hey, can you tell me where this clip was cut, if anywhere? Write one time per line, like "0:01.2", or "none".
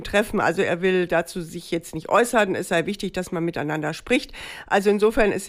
none